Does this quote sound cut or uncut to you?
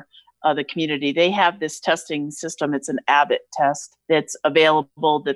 cut